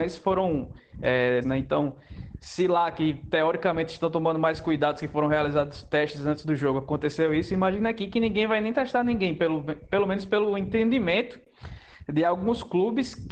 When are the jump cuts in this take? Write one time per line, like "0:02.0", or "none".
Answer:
0:01.4